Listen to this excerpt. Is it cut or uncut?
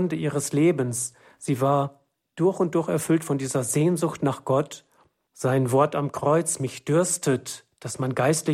cut